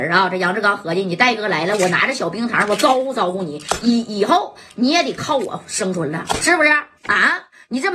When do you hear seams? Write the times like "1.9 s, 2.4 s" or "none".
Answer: 7.0 s